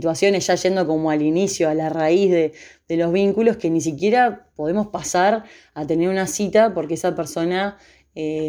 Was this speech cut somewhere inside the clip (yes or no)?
no